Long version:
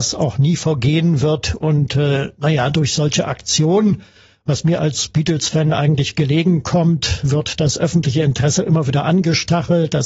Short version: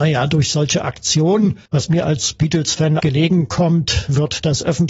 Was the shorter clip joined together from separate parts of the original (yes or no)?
yes